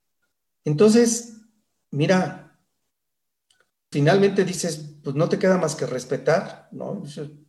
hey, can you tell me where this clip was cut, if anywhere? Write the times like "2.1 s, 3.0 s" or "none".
3.9 s